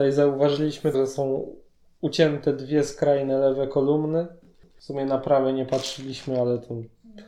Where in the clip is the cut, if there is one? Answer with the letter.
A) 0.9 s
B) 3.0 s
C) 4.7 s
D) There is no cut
A